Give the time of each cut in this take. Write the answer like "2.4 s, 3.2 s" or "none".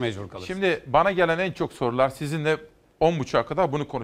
none